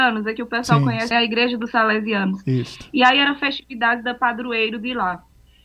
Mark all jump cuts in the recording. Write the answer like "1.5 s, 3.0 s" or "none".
1.1 s

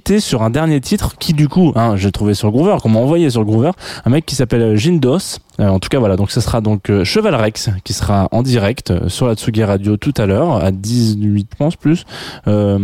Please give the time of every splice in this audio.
5.5 s, 11.5 s

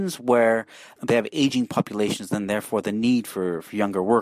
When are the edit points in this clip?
none

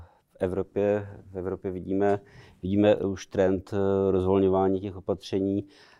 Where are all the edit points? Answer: none

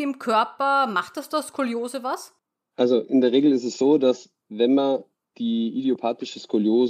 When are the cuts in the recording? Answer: none

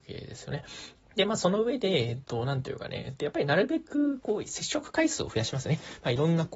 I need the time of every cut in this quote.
0.9 s

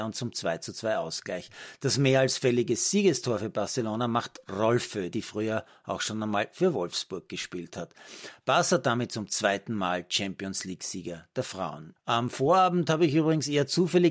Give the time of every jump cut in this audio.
5.1 s, 12.0 s

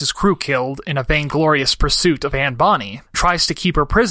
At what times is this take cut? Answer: 3.1 s

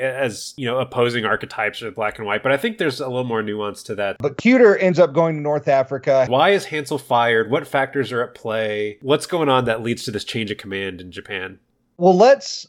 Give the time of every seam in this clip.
4.2 s, 6.3 s

